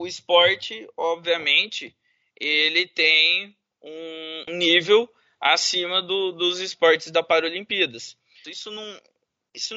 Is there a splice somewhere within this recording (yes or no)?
yes